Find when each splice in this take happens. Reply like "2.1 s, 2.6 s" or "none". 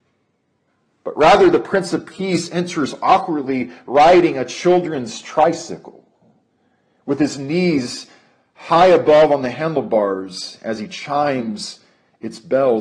none

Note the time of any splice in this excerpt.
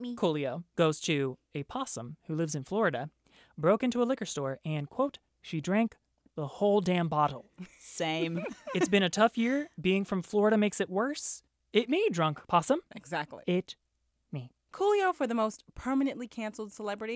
none

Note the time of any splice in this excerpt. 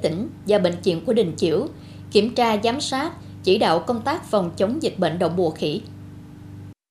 none

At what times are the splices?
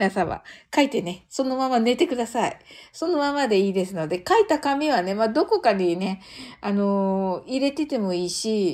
none

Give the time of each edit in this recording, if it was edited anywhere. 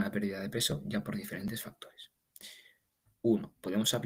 3.1 s

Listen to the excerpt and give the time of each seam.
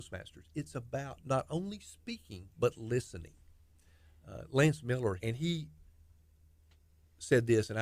2.5 s, 5.2 s

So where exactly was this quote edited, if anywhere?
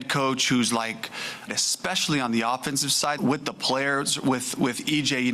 1.5 s, 3.2 s

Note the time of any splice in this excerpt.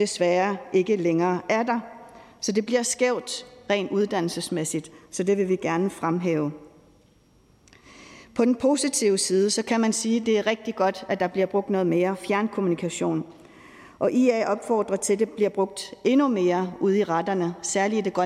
none

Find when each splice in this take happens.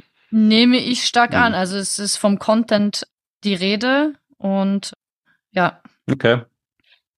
none

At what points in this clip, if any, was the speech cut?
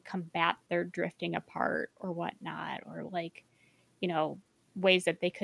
none

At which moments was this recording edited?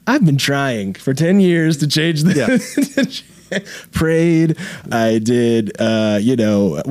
none

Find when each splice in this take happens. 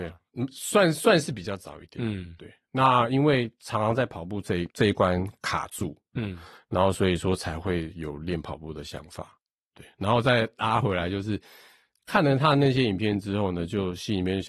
none

